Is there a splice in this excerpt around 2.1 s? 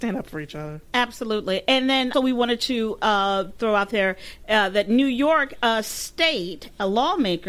yes; 1 cut; at 2.1 s

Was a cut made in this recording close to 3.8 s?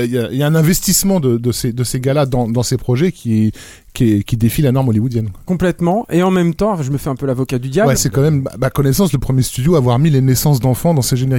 no; 1 cut; at 7.9 s

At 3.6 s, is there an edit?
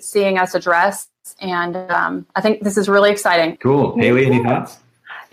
yes; 1 cut; at 3.6 s

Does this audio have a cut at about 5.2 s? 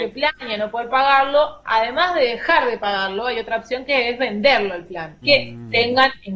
yes; 1 cut; at 5.2 s

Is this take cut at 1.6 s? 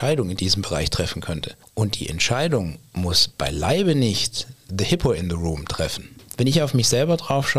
yes; 1 cut; at 1.6 s

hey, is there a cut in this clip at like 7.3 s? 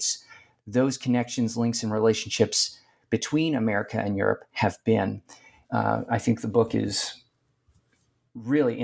no; 1 cut; at 5.6 s

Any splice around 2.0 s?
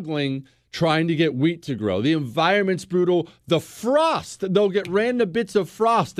no; 0 cuts

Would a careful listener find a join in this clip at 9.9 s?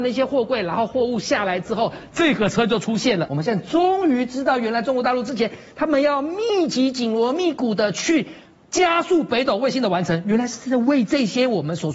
no; 2 cuts; at 2.1 s, 3.3 s

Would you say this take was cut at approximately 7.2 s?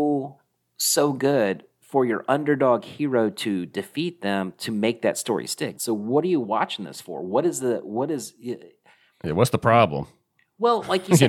no; 1 cut; at 5.7 s

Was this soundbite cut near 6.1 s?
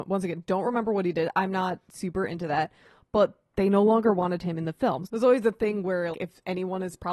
yes; 2 cuts; at 5.1 s, 6.1 s

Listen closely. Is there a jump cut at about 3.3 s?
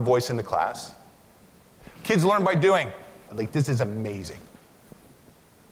yes; 2 cuts; at 2.0 s, 3.3 s

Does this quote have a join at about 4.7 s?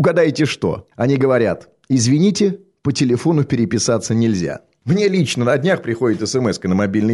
no; 1 cut; at 0.9 s

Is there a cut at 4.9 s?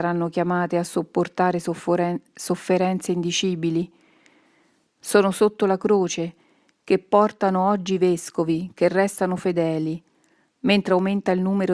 no; 0 cuts

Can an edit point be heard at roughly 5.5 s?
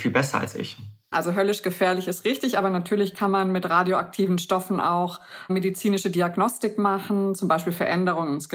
yes; 2 cuts; at 1.1 s, 5.5 s

